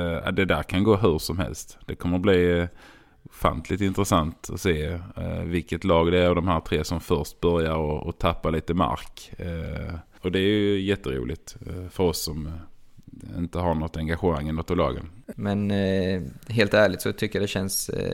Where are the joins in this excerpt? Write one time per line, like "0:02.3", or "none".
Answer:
0:10.2
0:15.3